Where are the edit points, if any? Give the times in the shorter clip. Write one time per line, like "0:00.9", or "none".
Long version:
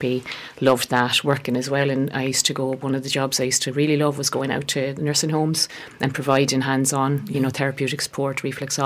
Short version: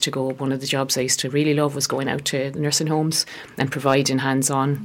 none